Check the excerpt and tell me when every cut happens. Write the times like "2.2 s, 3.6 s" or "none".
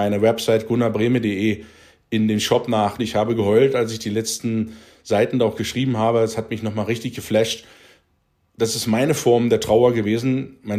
3.0 s

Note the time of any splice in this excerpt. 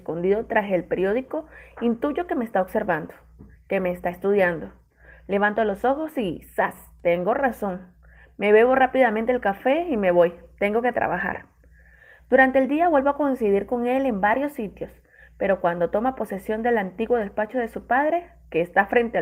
none

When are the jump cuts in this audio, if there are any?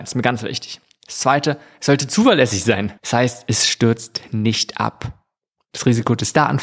3.0 s

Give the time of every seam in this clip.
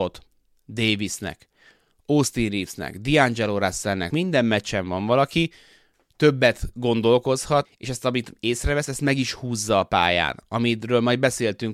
4.1 s, 7.6 s

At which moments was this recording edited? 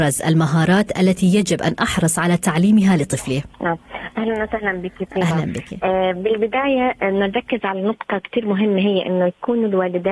3.5 s

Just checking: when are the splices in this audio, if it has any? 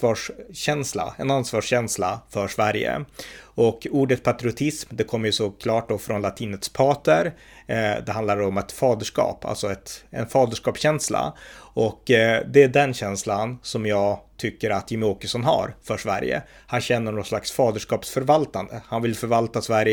none

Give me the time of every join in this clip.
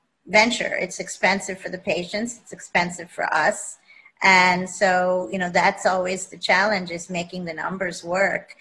none

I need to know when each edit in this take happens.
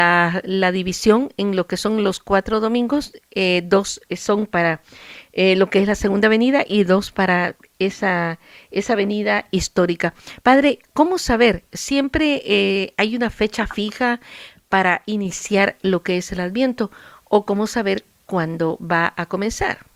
none

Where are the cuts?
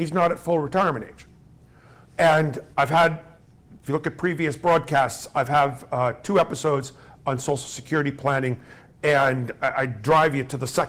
none

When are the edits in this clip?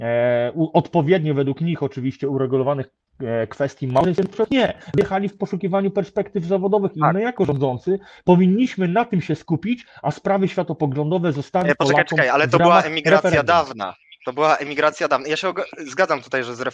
none

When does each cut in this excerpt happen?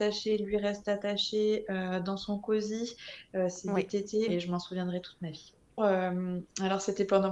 4.3 s, 5.8 s

